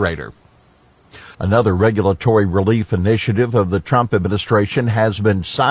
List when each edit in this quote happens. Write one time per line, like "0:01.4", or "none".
0:01.3